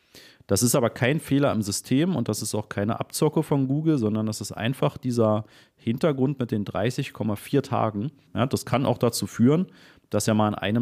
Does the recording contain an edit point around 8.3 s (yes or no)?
yes